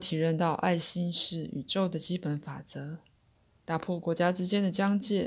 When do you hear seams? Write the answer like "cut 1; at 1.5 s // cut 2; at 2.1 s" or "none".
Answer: cut 1; at 3.6 s